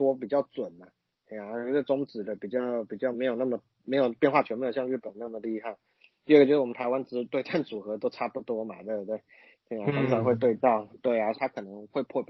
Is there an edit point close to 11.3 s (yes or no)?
yes